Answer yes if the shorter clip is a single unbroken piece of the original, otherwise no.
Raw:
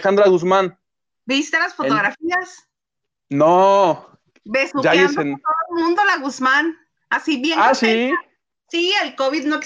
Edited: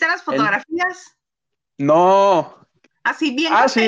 no